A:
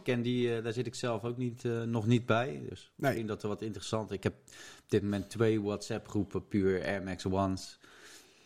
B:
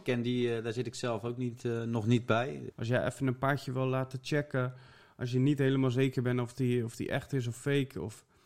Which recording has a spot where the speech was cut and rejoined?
B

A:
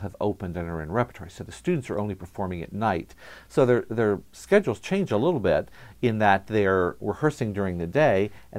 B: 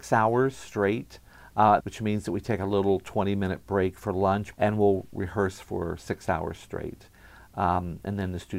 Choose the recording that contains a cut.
B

